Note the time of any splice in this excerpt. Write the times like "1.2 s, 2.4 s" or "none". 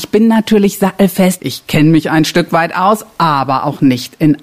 1.4 s